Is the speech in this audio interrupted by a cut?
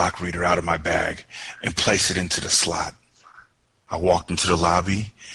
yes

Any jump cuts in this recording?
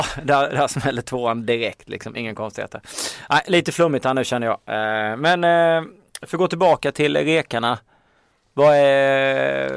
no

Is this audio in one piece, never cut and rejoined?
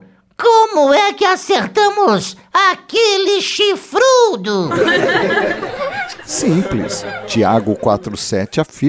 yes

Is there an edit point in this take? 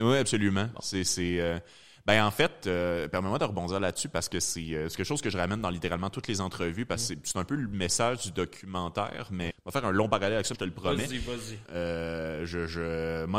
yes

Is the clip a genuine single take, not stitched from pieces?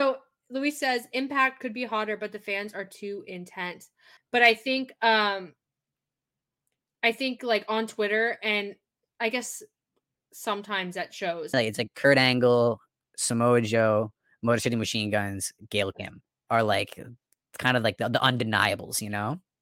no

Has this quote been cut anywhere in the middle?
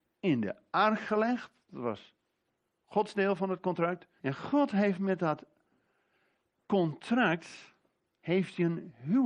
yes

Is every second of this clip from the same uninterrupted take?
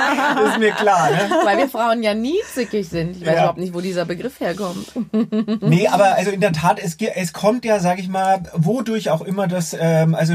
yes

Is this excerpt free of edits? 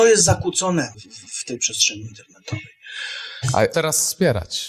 no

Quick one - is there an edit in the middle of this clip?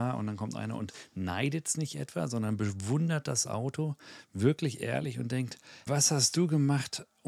yes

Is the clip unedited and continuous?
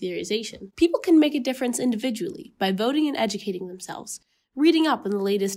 yes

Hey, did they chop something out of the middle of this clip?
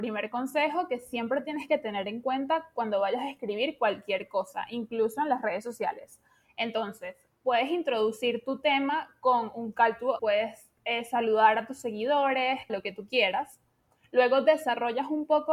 yes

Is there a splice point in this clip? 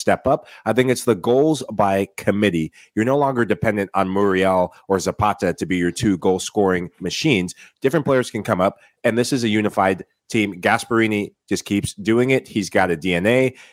no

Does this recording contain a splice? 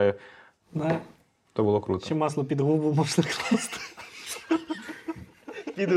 no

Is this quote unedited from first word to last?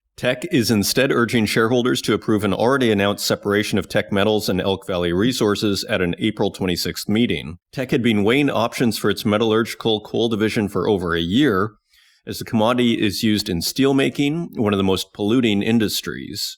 no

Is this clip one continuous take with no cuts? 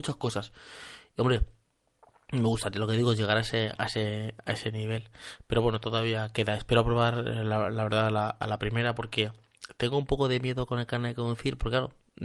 yes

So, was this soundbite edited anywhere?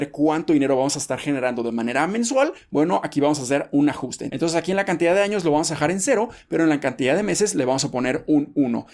no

